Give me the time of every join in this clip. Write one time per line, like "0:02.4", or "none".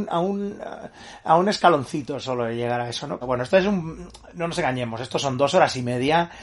0:03.2